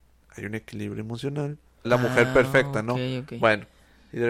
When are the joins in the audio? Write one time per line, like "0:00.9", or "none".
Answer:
0:01.8